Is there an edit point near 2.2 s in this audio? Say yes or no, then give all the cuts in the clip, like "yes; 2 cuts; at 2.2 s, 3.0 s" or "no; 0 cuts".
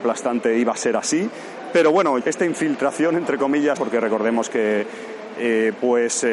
yes; 3 cuts; at 2.2 s, 3.8 s, 5.3 s